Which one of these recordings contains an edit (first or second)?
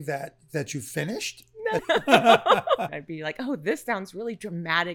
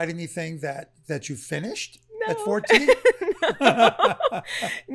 first